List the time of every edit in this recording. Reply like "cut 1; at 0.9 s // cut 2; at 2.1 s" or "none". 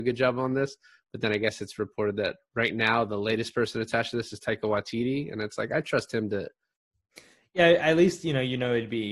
cut 1; at 6.8 s